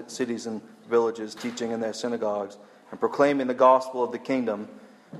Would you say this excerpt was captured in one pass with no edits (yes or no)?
yes